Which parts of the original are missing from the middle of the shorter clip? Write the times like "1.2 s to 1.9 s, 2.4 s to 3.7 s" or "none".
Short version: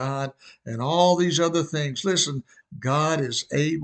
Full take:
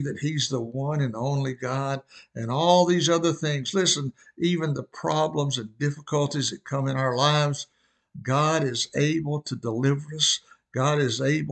4.3 s to 8.0 s